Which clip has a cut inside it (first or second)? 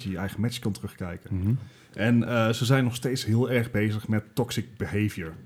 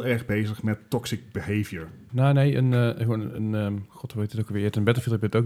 second